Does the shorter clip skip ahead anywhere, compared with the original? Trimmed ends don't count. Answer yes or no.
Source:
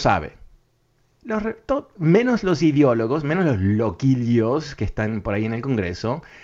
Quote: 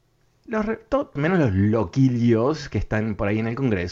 yes